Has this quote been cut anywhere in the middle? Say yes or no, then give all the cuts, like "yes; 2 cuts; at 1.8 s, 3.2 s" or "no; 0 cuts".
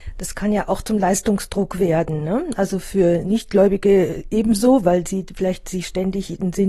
no; 0 cuts